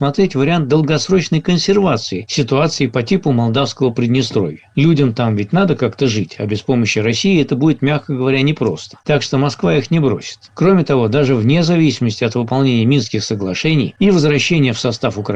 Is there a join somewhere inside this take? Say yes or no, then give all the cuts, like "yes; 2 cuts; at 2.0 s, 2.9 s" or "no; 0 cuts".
no; 0 cuts